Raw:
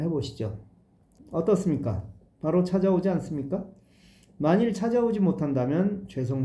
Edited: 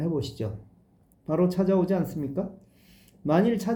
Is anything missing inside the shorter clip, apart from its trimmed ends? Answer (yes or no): yes